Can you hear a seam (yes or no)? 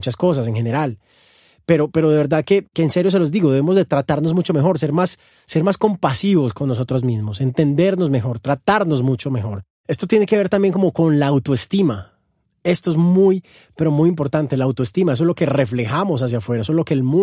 no